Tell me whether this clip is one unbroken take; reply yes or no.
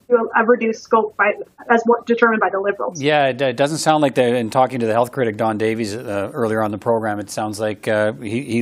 yes